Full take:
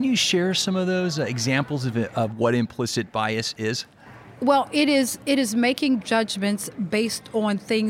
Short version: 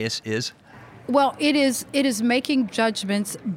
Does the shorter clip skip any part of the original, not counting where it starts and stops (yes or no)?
no